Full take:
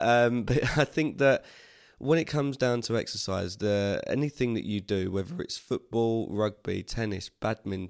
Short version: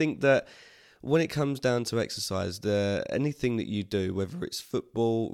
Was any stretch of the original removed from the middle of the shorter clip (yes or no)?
no